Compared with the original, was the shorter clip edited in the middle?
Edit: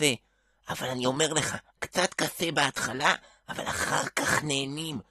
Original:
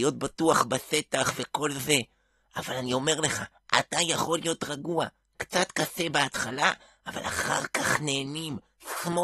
yes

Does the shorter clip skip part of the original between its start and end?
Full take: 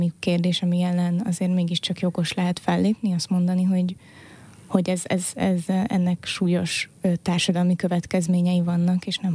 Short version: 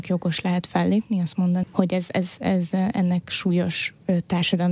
yes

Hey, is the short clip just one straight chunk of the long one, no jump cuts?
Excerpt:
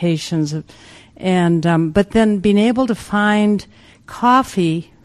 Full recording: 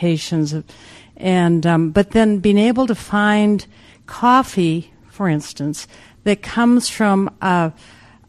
yes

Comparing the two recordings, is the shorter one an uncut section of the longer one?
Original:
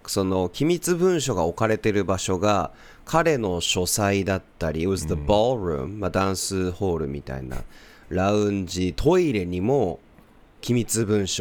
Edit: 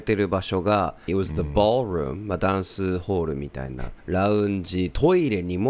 no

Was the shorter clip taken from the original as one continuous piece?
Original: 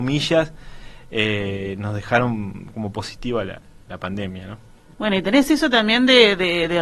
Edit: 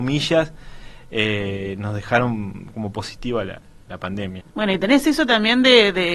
no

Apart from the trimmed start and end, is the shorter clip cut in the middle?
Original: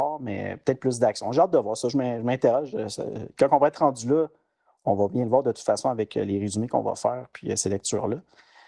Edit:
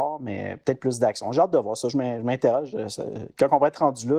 no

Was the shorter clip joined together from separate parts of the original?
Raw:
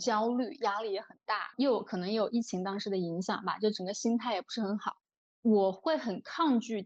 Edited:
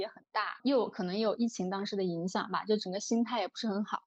no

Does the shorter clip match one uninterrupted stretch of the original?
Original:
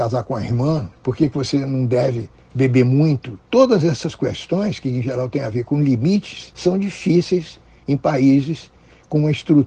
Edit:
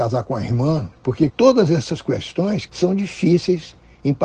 no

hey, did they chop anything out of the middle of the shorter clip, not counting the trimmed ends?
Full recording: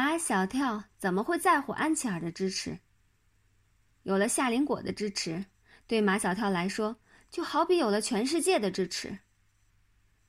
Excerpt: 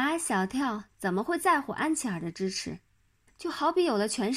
yes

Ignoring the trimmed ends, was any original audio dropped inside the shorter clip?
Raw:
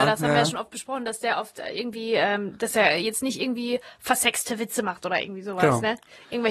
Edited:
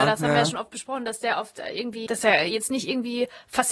yes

